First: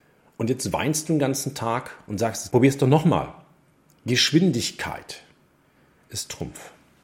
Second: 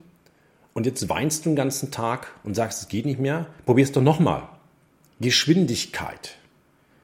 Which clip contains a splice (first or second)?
first